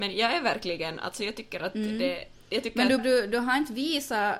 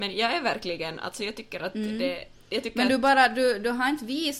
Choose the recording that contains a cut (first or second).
first